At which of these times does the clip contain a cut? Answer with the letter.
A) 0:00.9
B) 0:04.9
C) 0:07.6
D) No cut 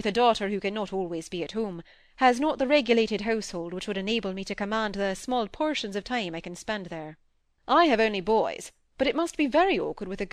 C